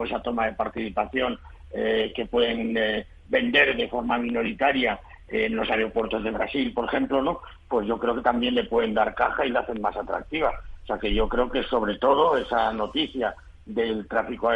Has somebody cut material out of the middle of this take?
no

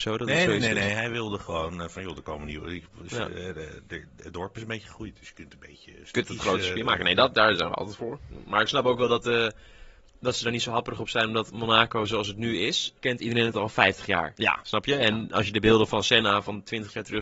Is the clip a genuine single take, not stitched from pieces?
no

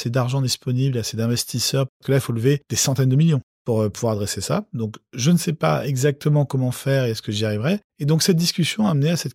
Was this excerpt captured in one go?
no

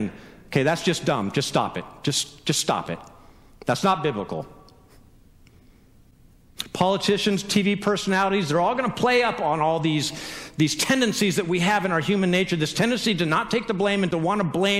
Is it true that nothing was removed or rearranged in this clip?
yes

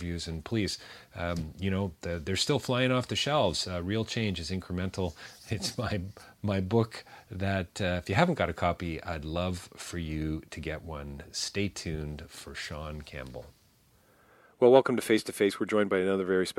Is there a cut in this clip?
no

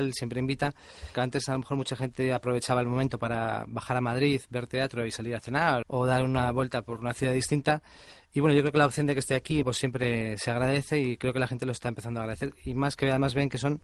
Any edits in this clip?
yes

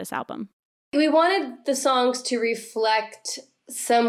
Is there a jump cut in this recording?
no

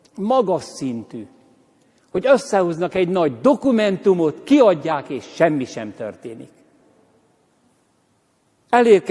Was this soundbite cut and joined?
no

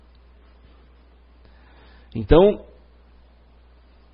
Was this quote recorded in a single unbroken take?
yes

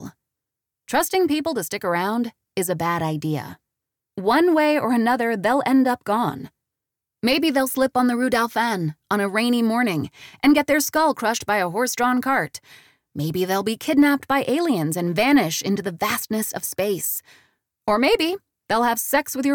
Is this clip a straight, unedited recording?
yes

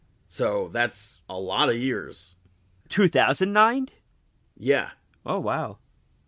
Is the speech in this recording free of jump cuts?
no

